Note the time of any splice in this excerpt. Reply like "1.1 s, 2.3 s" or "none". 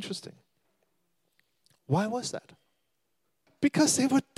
3.5 s